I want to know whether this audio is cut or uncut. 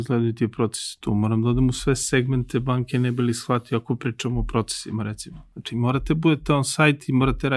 uncut